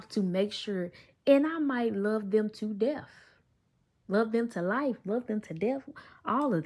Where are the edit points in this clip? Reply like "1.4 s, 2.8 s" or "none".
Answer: none